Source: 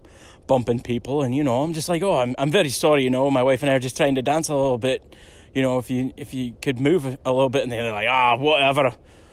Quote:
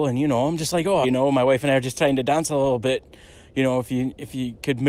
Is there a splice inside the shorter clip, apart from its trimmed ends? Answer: yes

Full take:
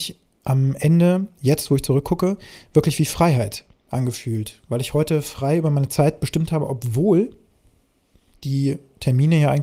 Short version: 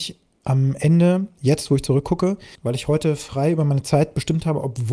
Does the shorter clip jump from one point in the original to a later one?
yes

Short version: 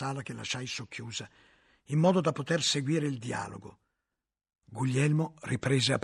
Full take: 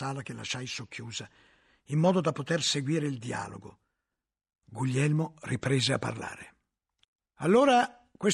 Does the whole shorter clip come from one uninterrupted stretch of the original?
yes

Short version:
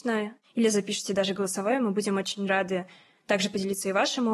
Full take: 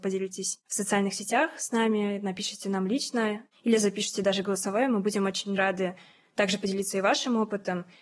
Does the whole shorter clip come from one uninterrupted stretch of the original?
yes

